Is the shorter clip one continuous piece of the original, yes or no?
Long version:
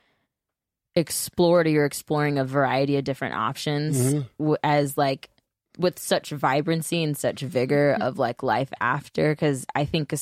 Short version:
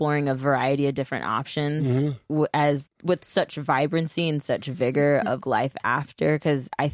no